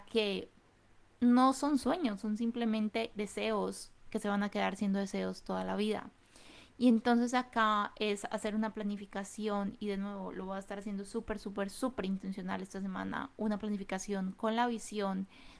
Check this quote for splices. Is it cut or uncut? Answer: uncut